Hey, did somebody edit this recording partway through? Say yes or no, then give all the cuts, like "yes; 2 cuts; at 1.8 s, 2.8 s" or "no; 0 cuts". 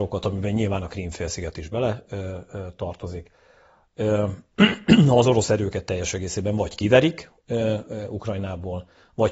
no; 0 cuts